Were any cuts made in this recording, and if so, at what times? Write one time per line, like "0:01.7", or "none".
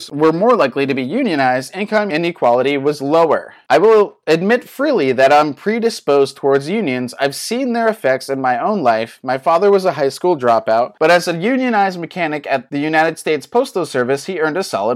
none